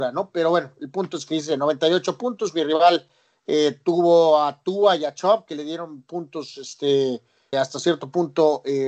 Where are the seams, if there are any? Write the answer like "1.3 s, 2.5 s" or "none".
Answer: 7.5 s